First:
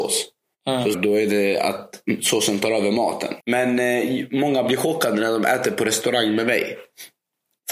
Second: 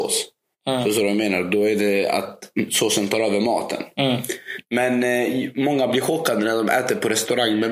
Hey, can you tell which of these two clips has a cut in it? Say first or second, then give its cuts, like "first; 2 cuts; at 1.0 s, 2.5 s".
first; 2 cuts; at 0.9 s, 3.4 s